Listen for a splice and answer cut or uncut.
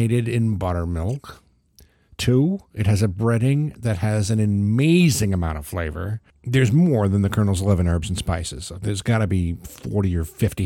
uncut